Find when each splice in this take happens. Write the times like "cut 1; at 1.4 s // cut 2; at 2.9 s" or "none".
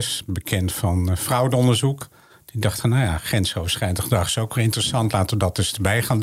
none